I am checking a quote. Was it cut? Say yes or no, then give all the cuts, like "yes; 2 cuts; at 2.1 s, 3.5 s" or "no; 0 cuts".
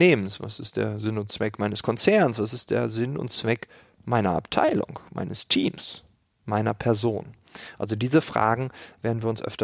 no; 0 cuts